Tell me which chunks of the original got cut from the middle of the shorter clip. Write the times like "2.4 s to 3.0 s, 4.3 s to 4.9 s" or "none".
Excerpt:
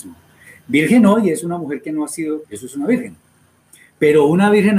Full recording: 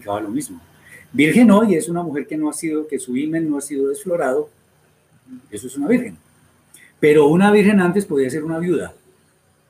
2.9 s to 5.5 s